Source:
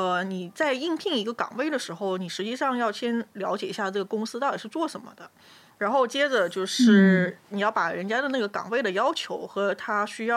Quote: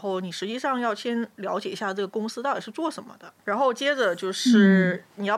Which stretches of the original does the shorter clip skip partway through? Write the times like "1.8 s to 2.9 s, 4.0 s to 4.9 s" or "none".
5.4 s to 5.7 s